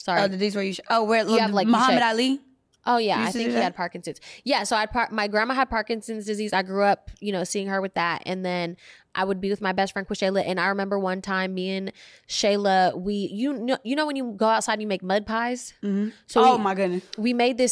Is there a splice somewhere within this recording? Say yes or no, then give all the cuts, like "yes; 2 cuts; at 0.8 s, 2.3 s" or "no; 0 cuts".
no; 0 cuts